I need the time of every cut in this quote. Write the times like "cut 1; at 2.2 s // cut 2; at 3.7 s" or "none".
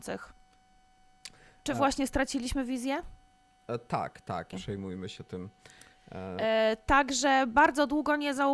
cut 1; at 4.5 s